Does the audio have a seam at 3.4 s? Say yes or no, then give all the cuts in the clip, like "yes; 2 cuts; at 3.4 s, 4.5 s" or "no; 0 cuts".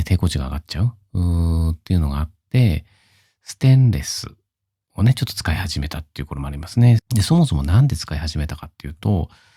no; 1 cut; at 7.0 s